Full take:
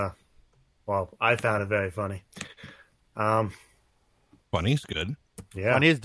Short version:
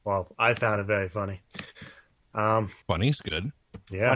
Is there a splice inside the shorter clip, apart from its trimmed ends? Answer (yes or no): yes